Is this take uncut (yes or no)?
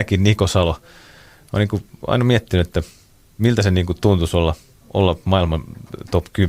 yes